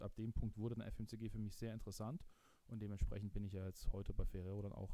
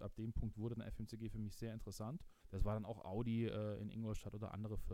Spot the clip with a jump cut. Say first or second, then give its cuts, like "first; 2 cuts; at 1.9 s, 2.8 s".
second; 1 cut; at 2.4 s